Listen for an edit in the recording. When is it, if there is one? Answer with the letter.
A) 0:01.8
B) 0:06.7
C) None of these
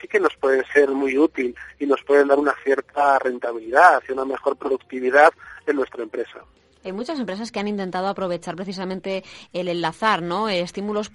C